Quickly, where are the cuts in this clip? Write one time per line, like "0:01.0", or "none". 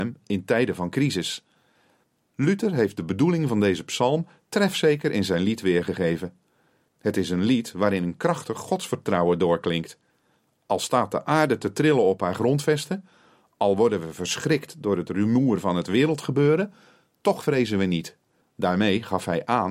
0:18.4